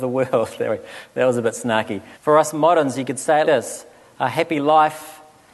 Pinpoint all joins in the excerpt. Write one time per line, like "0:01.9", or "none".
0:02.1
0:03.4